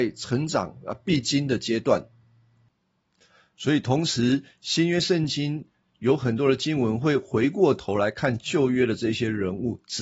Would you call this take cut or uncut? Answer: uncut